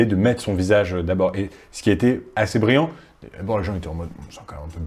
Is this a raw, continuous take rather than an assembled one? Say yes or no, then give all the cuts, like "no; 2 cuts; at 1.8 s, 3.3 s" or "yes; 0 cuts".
yes; 0 cuts